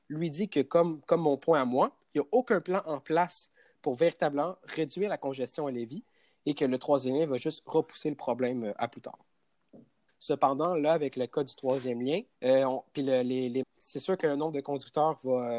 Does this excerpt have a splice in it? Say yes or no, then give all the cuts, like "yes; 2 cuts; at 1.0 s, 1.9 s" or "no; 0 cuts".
yes; 3 cuts; at 10.1 s, 12.3 s, 13.6 s